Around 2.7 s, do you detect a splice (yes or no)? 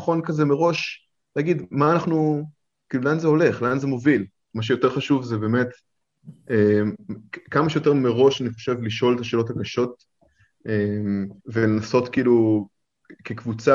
no